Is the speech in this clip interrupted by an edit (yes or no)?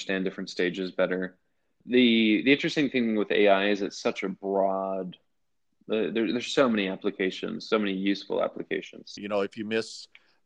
yes